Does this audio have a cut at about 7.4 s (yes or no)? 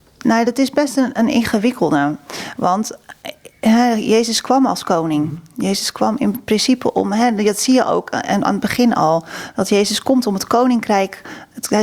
no